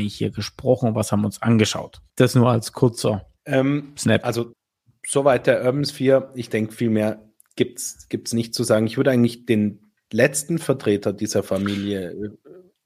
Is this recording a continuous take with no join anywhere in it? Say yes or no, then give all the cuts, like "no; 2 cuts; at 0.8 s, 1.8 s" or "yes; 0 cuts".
yes; 0 cuts